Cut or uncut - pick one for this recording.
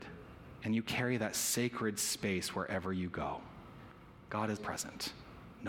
cut